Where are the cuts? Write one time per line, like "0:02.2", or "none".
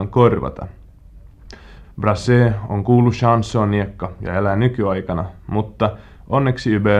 0:01.8